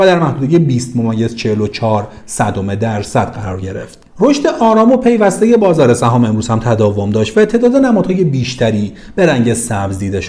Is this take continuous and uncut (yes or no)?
no